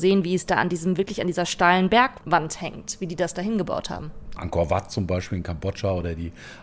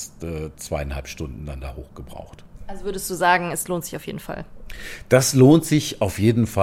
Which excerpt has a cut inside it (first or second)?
first